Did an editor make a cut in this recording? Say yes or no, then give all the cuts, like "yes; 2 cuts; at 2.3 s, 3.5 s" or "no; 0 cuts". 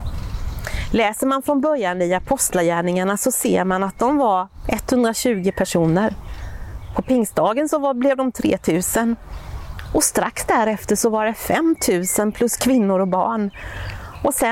no; 0 cuts